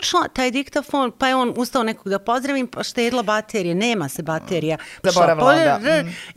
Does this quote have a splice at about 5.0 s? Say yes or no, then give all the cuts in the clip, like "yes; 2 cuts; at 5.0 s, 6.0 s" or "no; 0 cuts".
yes; 1 cut; at 5.0 s